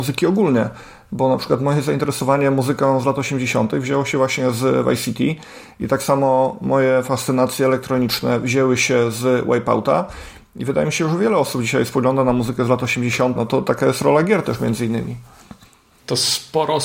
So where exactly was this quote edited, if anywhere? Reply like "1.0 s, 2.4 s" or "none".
13.4 s

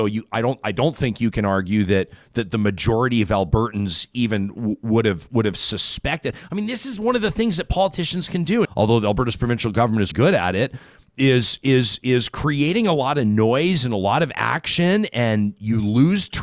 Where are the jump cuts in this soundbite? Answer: 8.7 s, 10.1 s

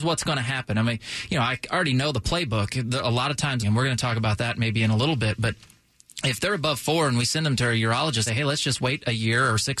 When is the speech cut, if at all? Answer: 3.6 s, 8.3 s

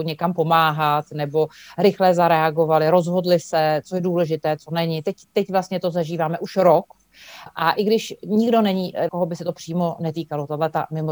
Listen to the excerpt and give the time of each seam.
7.5 s, 9.1 s

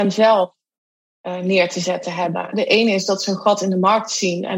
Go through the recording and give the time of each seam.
2.5 s

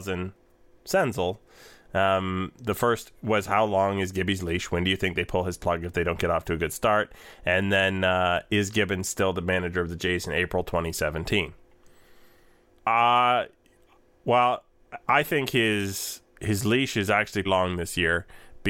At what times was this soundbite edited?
12.7 s, 16.3 s, 17.4 s

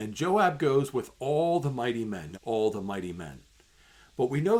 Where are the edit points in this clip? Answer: 2.3 s

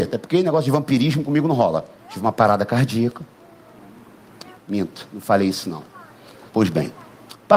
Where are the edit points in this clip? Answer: 2.0 s, 4.6 s, 6.5 s

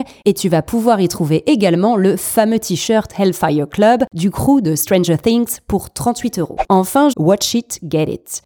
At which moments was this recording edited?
7.1 s

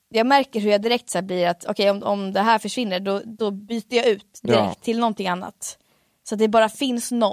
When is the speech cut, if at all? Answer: none

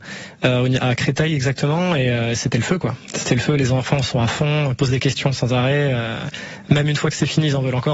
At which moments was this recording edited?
none

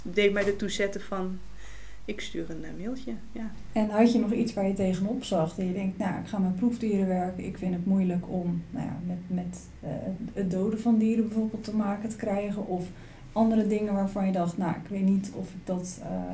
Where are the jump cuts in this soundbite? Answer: none

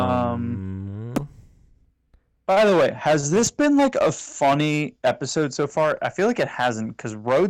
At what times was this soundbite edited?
none

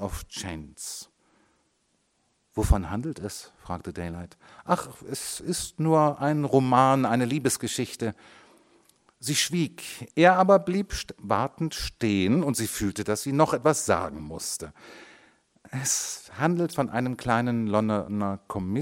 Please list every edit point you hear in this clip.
none

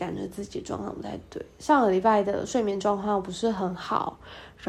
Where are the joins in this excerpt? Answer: none

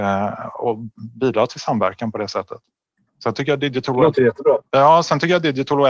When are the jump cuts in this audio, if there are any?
none

